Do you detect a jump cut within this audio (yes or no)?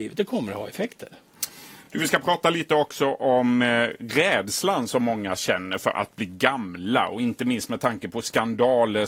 no